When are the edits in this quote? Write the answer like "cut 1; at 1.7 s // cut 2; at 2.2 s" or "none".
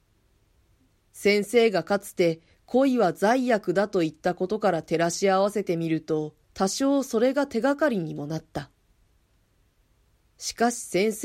cut 1; at 1.0 s // cut 2; at 6.4 s